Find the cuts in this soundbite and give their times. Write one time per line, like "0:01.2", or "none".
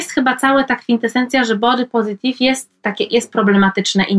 none